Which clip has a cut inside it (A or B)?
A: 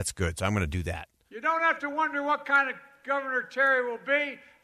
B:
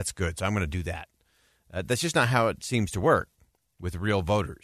A